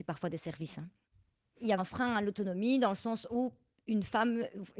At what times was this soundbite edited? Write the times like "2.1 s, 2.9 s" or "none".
1.8 s